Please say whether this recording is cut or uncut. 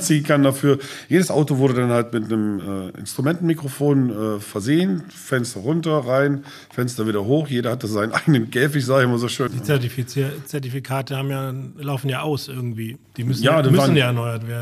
cut